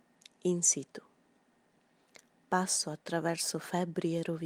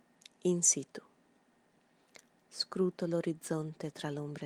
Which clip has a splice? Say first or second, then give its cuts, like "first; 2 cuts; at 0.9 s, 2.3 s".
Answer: second; 1 cut; at 2.4 s